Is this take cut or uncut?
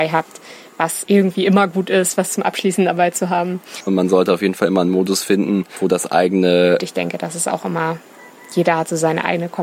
cut